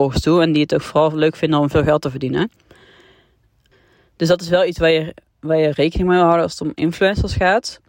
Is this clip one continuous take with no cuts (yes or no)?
yes